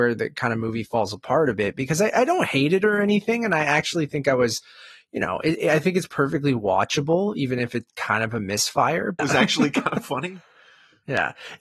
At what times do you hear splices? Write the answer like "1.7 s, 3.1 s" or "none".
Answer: 9.2 s